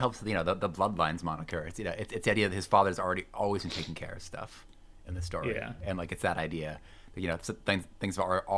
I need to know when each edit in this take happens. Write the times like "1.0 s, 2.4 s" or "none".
none